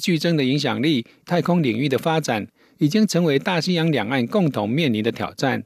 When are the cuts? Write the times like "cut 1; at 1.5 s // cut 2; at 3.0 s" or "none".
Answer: cut 1; at 1.2 s